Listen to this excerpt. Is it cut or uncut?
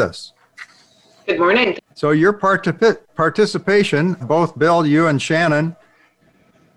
cut